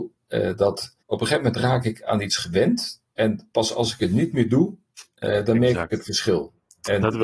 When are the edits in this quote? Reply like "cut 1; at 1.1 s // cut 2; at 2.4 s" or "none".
cut 1; at 1.0 s